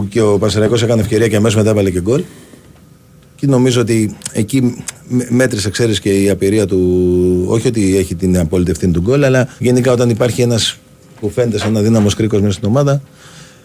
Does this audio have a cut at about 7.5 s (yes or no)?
no